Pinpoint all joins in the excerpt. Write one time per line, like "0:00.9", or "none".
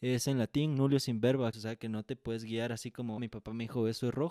0:01.5
0:03.2

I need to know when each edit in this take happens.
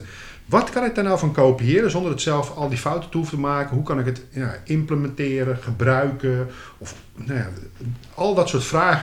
none

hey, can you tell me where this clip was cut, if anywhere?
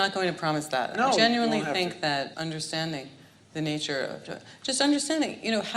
0:01.1
0:02.3

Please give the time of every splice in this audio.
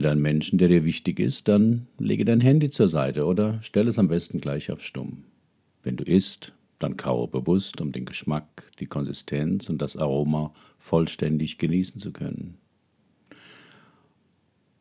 0:05.7

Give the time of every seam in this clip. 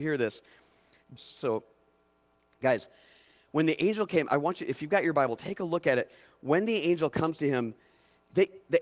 0:01.2

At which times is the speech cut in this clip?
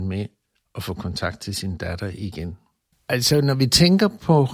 0:02.9

